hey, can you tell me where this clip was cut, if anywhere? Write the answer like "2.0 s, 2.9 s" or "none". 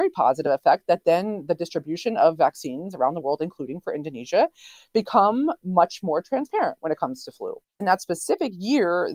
7.7 s